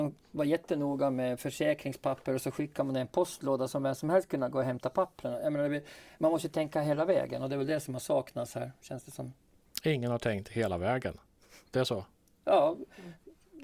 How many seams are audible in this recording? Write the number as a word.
zero